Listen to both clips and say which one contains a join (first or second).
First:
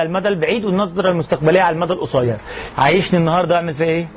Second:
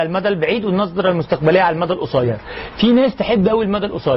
first